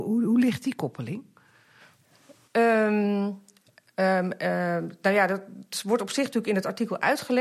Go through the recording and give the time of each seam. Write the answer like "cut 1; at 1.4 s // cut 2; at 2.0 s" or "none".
none